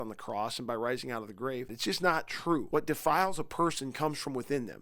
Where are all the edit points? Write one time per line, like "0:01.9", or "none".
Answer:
0:01.7